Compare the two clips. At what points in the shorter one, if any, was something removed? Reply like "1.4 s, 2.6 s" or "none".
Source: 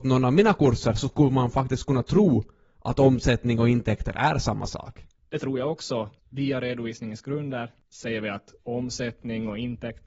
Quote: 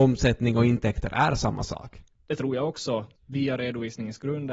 none